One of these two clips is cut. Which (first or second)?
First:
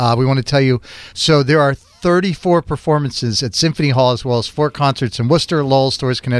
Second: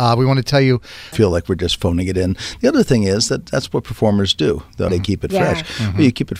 second